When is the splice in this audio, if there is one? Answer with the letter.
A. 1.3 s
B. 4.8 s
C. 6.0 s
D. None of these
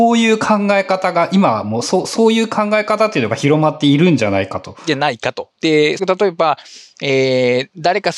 C